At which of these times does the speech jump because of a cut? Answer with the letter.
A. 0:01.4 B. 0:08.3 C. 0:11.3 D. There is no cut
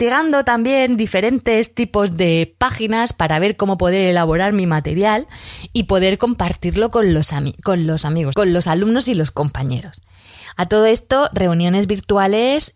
B